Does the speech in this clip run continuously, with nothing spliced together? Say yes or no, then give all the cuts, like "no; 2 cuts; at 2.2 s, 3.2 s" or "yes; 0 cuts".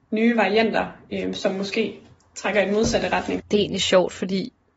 no; 1 cut; at 3.4 s